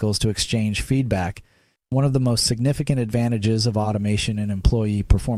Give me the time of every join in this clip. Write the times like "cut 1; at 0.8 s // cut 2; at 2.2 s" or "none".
cut 1; at 1.8 s